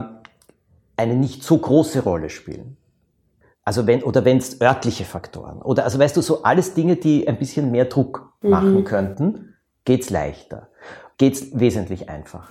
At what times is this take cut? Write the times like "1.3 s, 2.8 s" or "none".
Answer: 11.1 s